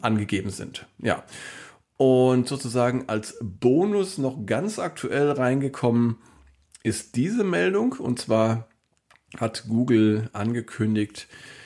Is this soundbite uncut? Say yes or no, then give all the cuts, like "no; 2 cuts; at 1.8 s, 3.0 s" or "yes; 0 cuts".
yes; 0 cuts